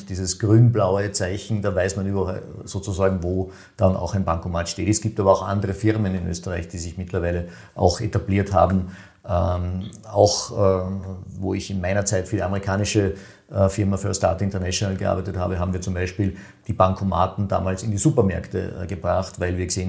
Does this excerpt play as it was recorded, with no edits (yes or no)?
yes